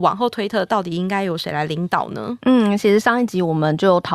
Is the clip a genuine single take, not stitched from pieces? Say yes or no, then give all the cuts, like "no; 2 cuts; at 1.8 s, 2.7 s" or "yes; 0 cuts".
yes; 0 cuts